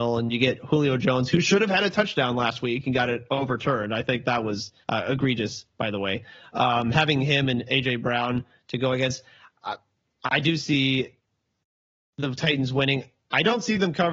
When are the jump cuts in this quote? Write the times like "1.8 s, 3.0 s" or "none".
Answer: 4.8 s